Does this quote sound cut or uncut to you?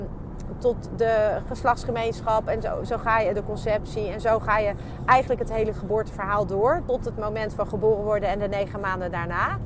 uncut